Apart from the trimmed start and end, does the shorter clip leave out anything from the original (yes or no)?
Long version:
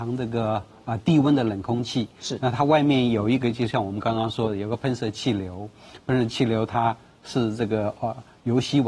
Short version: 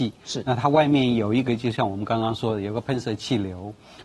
no